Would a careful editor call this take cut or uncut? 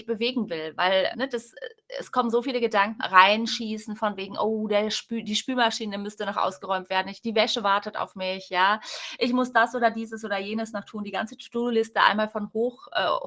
cut